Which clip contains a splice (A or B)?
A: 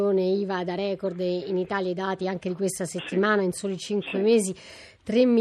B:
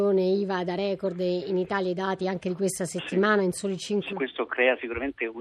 B